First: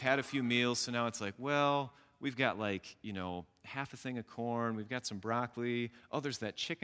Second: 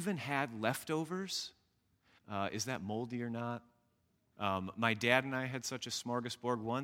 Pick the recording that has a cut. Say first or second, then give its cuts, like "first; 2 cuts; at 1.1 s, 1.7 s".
second; 2 cuts; at 2.2 s, 4.3 s